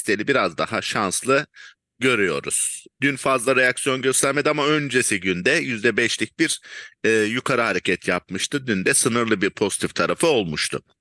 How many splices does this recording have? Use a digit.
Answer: 1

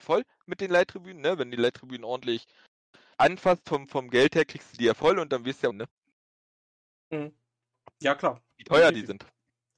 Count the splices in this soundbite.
2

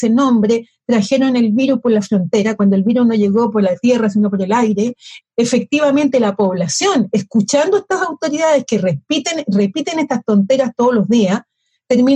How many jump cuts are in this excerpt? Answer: 1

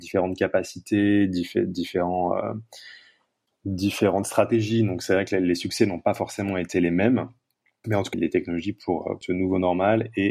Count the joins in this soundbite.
2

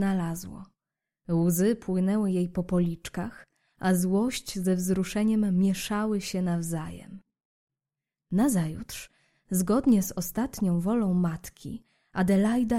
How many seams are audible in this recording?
0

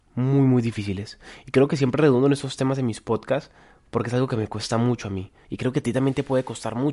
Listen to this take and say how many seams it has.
1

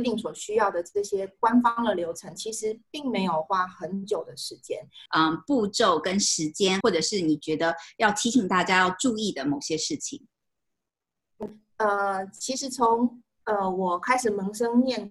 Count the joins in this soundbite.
2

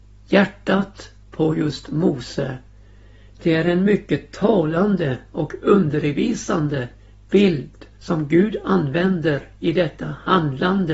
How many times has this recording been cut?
2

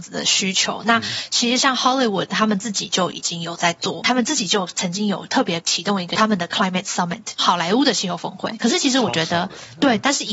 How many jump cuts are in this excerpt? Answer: 2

